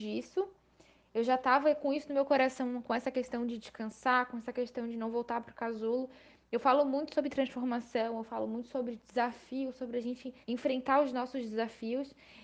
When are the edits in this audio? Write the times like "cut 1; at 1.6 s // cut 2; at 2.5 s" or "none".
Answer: cut 1; at 10.4 s

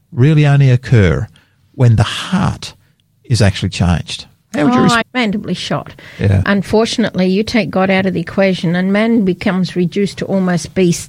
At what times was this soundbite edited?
cut 1; at 5.0 s // cut 2; at 6.4 s

